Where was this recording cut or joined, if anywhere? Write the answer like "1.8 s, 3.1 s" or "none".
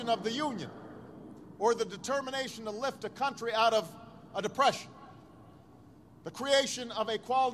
none